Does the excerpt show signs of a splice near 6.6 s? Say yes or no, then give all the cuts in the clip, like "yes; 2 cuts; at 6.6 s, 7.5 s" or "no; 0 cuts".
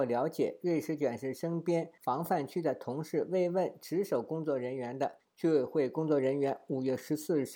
no; 0 cuts